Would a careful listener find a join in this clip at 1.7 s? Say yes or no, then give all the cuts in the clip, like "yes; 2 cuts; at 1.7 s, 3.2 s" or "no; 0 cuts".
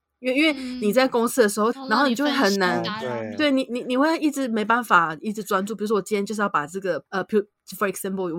yes; 2 cuts; at 1.7 s, 7.1 s